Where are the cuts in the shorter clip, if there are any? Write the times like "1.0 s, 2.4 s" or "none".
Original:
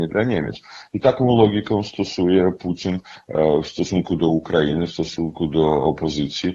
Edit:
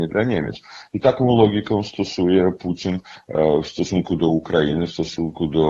none